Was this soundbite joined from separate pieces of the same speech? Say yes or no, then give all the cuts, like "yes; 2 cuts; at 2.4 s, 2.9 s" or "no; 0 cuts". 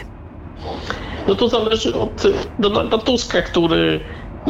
no; 0 cuts